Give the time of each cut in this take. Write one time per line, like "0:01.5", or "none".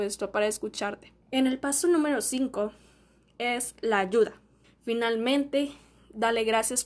0:01.2
0:04.6